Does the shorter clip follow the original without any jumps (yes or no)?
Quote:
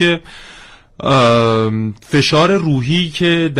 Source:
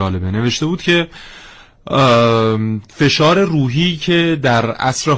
yes